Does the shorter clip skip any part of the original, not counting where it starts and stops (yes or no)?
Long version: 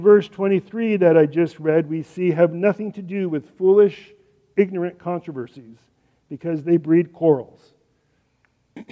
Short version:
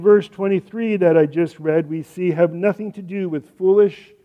no